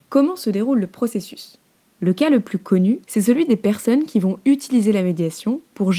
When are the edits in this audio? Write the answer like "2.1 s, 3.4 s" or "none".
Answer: 1.9 s, 3.0 s